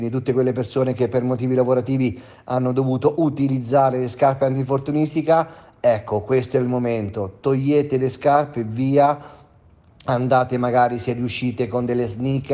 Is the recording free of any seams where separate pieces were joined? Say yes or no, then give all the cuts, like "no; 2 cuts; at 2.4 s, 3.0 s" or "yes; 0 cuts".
yes; 0 cuts